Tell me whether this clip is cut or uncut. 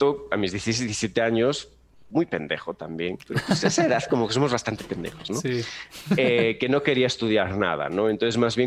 uncut